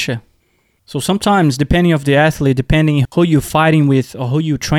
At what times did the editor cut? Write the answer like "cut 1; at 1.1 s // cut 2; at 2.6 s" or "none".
none